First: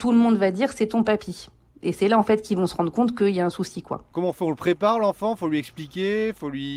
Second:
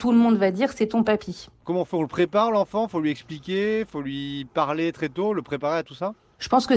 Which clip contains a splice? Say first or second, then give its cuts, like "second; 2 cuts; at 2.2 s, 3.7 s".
second; 1 cut; at 1.6 s